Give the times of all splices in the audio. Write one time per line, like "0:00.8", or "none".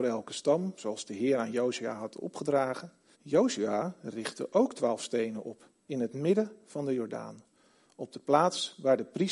0:03.1